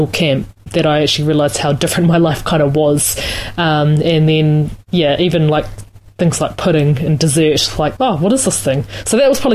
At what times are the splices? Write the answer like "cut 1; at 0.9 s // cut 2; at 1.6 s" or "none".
cut 1; at 8.0 s